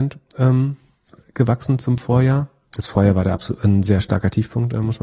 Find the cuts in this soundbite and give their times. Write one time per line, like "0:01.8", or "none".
none